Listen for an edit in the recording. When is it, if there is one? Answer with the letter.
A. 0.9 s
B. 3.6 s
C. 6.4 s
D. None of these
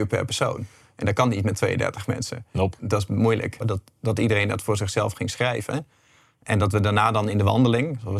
B